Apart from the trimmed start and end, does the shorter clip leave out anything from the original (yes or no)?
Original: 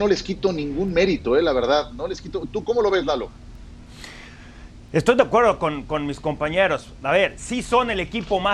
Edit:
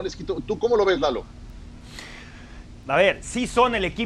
yes